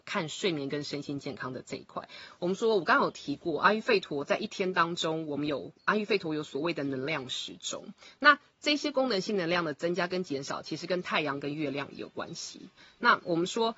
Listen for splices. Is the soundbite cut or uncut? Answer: cut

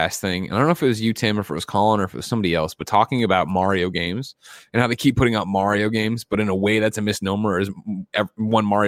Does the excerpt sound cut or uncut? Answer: uncut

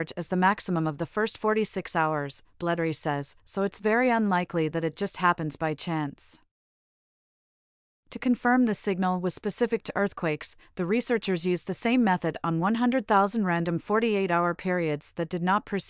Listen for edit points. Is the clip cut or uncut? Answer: uncut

